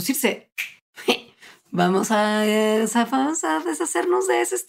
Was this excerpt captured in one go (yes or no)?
yes